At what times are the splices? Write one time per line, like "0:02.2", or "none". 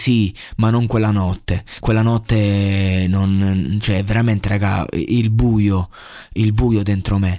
none